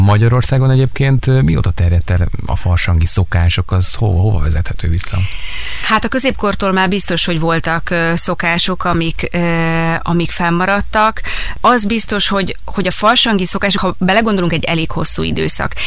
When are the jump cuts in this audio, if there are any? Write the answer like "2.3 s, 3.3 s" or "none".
13.8 s

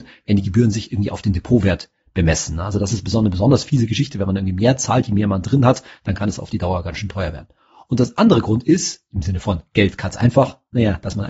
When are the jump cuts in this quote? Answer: none

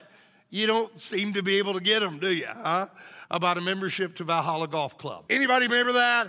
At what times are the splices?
3.3 s, 5.3 s

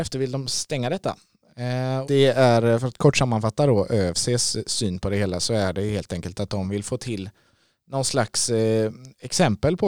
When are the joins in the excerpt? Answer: 2.0 s

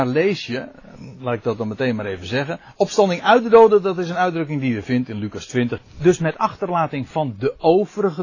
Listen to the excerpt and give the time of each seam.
5.8 s

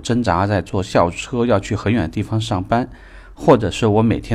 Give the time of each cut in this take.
none

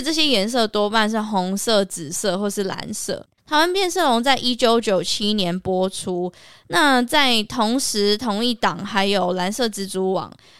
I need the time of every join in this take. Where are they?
3.4 s

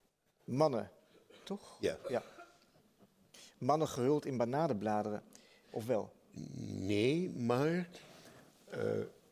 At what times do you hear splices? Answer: 1.4 s, 5.6 s

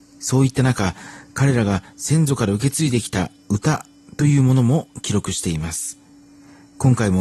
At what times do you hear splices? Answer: none

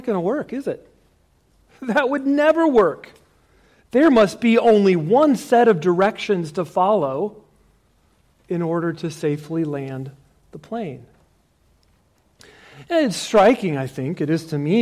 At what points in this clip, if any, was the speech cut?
none

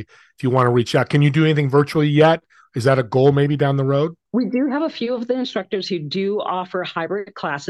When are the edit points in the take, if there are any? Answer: 4.3 s

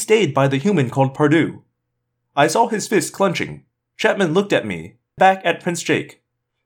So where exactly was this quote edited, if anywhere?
3.9 s, 5.2 s

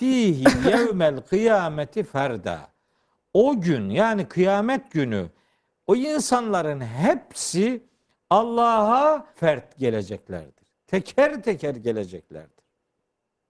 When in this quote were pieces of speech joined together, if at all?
9.3 s

